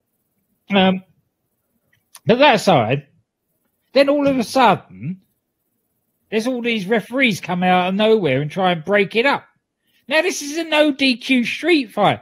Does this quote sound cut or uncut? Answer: uncut